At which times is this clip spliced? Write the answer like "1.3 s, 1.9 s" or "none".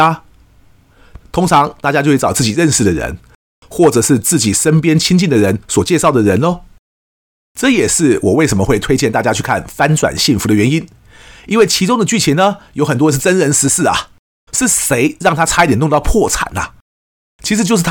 1.2 s, 14.5 s

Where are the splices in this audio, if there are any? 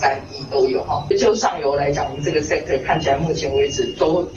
none

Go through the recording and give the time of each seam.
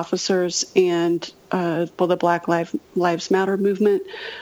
2.0 s

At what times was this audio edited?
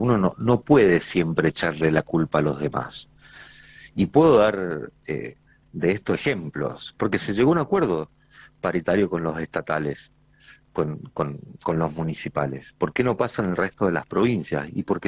6.9 s

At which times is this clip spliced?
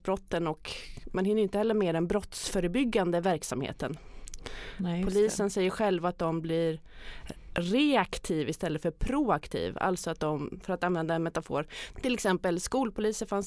10.6 s, 11.9 s

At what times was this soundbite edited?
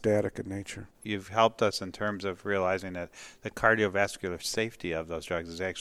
0.9 s

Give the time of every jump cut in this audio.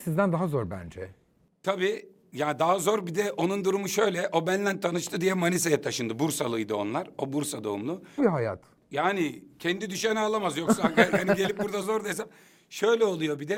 8.2 s, 11.8 s

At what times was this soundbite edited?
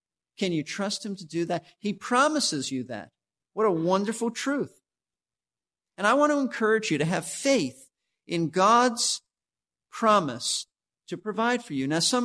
3.4 s

